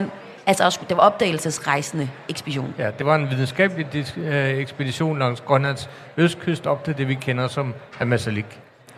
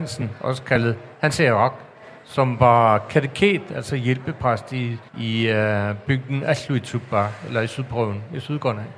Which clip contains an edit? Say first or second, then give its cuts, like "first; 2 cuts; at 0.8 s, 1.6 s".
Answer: second; 1 cut; at 5.1 s